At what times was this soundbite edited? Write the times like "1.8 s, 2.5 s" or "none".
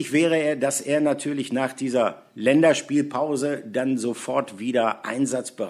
none